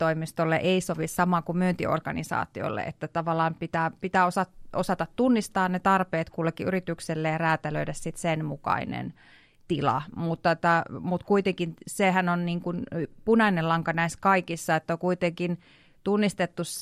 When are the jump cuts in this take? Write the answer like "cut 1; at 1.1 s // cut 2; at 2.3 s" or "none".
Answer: none